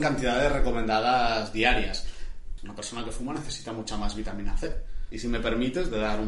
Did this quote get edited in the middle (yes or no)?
yes